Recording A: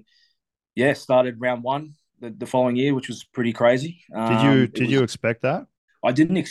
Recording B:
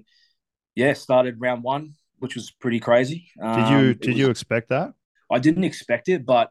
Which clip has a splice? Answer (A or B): B